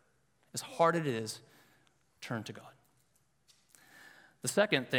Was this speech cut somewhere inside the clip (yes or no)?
no